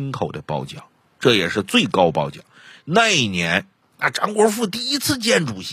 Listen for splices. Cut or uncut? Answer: cut